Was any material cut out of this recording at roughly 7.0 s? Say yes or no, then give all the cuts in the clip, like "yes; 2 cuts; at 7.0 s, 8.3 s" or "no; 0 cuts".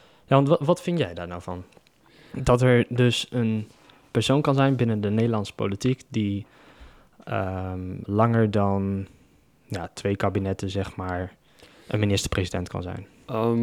no; 0 cuts